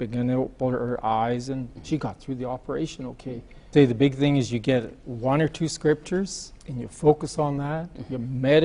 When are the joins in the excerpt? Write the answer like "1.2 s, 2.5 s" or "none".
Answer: 3.7 s, 6.6 s